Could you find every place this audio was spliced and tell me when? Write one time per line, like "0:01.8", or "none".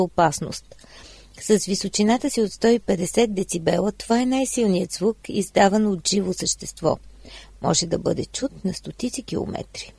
none

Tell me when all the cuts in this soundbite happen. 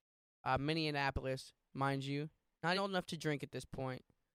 0:01.7
0:02.7

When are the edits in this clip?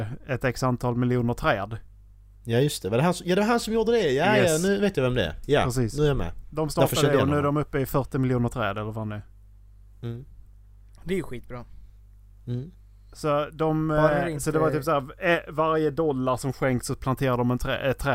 none

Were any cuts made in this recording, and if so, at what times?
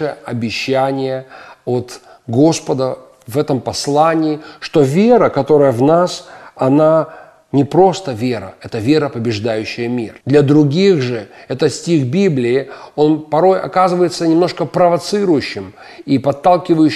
0:10.2

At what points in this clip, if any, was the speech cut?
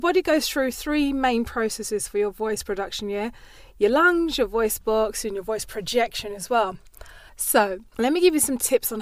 0:07.3

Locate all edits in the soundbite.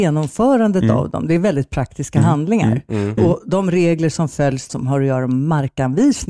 0:03.2
0:04.7

